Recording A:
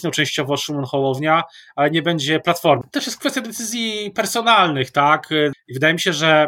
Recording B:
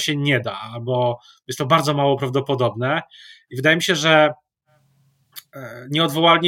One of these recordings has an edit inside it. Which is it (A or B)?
A